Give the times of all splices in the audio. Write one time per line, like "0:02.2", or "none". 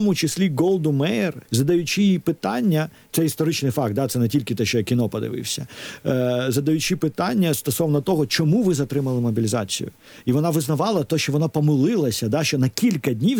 0:01.4